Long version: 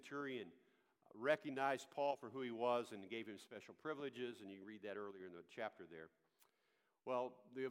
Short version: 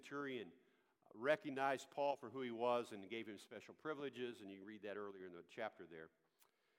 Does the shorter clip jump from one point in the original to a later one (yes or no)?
no